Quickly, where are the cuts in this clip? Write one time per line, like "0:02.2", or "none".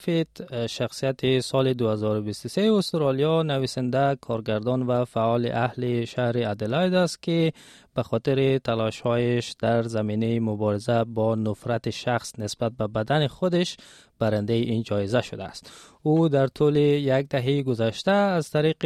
none